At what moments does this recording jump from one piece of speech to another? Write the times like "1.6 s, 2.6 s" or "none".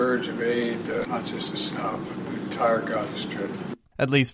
1.0 s